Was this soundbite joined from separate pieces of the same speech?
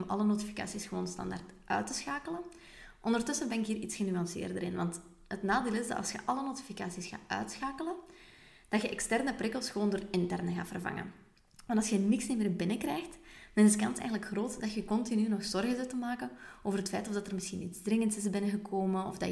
no; 0 cuts

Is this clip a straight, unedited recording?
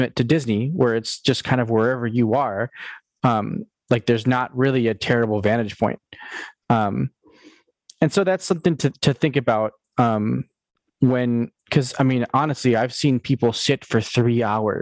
yes; 0 cuts

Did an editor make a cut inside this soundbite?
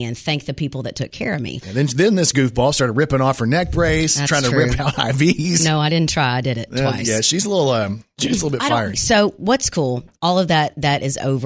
yes; 2 cuts; at 1.6 s, 8.9 s

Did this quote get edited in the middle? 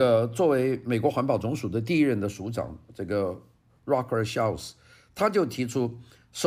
no; 0 cuts

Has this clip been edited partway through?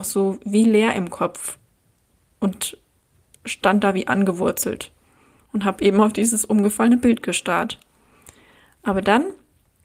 no; 0 cuts

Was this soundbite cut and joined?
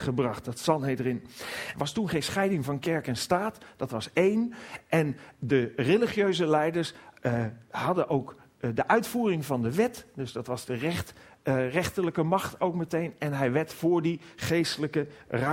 yes; 1 cut; at 1.7 s

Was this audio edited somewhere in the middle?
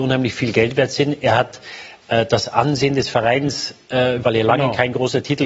yes; 1 cut; at 4.2 s

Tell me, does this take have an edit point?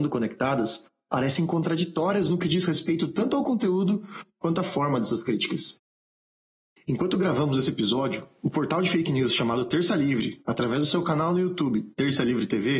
no; 0 cuts

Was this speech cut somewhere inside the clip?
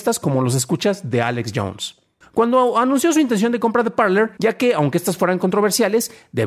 yes; 2 cuts; at 2.2 s, 4.4 s

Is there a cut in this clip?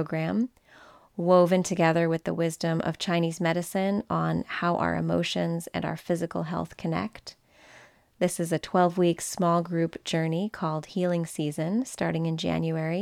no; 0 cuts

